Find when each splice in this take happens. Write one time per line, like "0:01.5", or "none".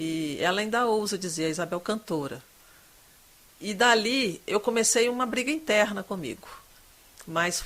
none